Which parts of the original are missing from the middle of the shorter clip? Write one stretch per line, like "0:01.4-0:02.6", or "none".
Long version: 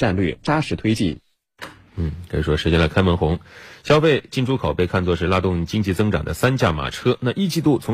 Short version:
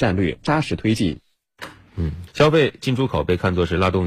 0:02.3-0:03.8